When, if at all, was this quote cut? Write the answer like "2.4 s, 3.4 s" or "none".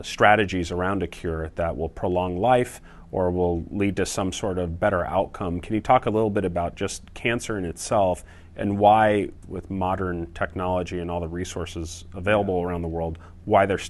9.4 s